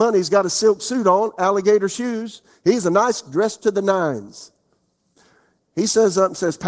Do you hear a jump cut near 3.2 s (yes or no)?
yes